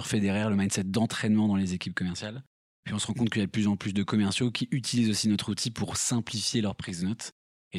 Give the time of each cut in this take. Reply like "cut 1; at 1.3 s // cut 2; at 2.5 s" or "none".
none